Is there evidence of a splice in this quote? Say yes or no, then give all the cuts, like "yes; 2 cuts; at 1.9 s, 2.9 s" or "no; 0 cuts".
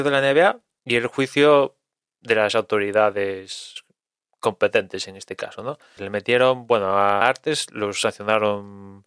yes; 2 cuts; at 6.0 s, 7.2 s